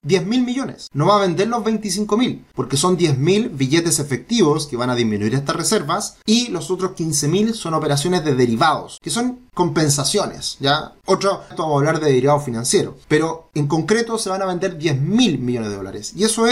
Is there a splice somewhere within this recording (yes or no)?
no